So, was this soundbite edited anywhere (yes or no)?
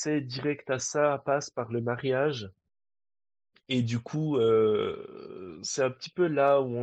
no